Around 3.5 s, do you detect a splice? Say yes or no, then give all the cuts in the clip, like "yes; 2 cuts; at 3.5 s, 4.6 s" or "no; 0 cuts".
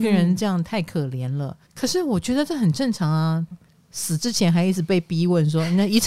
yes; 2 cuts; at 1.7 s, 3.5 s